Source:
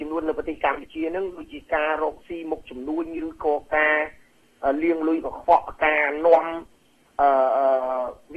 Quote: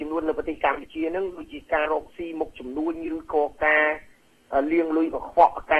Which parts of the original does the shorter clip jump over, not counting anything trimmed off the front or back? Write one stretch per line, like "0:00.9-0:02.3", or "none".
0:01.9-0:02.0